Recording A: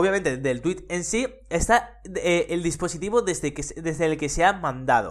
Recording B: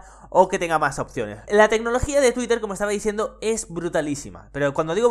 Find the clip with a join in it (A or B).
B